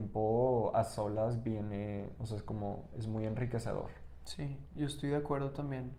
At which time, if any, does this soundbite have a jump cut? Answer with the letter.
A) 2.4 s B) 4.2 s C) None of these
C